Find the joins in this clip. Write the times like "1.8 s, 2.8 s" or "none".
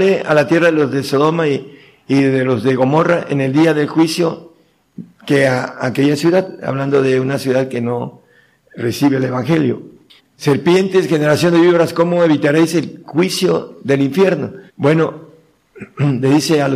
10.2 s, 14.7 s